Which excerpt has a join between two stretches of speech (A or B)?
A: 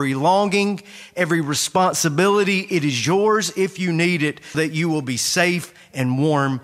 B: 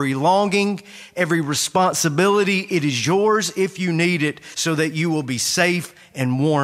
A